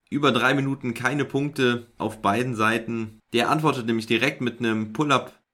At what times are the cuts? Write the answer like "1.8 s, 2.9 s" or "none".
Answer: 3.2 s